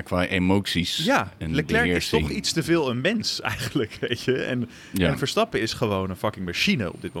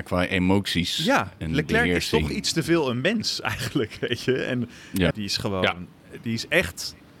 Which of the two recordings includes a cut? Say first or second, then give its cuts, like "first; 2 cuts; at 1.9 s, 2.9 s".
second; 1 cut; at 5.1 s